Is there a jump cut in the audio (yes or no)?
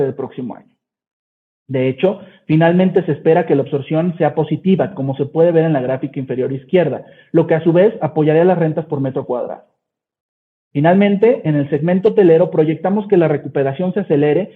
no